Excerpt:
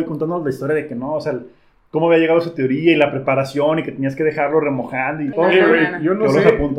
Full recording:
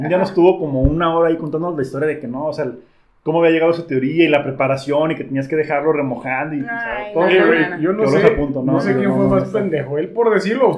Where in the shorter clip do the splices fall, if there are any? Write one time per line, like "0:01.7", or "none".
0:05.3